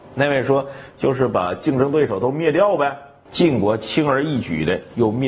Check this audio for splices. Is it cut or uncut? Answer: cut